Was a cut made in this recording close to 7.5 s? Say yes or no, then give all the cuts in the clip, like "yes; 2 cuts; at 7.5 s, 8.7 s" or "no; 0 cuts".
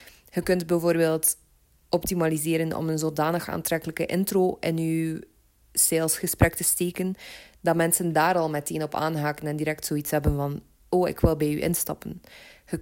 no; 0 cuts